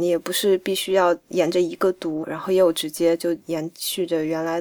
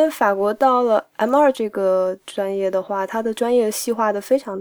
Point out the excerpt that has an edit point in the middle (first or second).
first